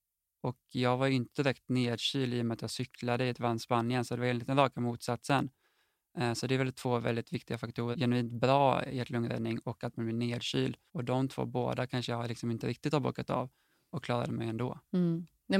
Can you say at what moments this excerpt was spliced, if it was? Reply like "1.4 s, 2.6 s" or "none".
7.9 s, 10.9 s